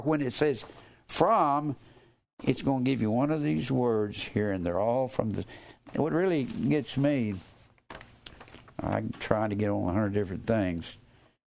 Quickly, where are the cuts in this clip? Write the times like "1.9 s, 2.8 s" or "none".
none